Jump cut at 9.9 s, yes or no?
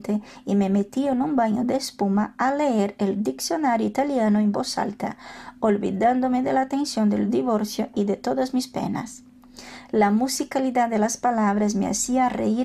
no